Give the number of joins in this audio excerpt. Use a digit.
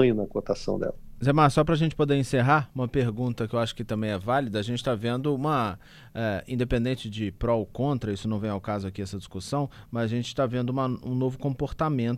0